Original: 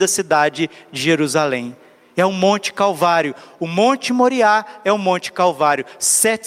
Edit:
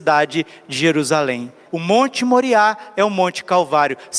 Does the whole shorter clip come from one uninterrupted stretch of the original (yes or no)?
no